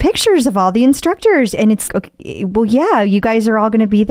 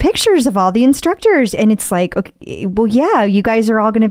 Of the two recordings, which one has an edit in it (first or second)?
first